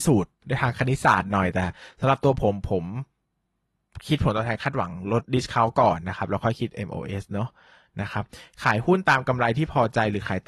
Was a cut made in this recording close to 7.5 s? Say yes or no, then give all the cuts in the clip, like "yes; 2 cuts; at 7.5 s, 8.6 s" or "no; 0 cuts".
no; 1 cut; at 5.2 s